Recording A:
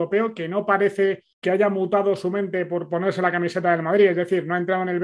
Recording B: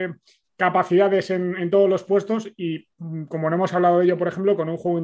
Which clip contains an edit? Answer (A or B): A